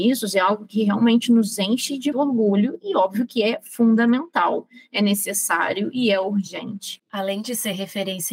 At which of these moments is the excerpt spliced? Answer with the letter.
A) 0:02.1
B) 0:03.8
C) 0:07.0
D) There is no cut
A